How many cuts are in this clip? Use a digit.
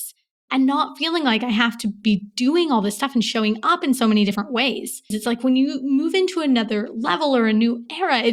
1